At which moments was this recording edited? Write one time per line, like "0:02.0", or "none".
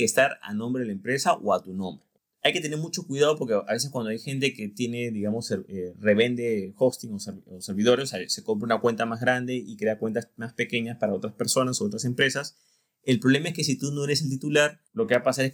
none